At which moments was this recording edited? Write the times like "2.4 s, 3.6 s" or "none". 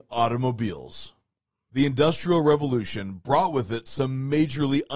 none